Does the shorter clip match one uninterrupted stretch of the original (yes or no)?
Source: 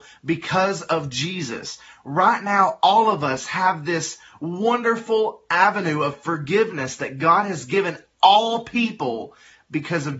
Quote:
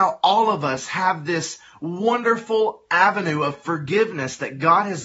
yes